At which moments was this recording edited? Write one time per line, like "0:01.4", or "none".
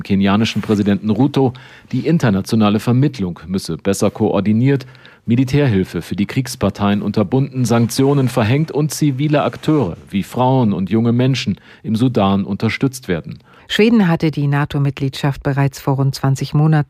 0:13.6